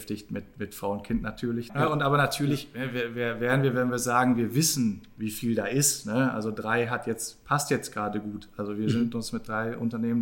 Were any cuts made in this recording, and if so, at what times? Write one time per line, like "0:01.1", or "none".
0:01.7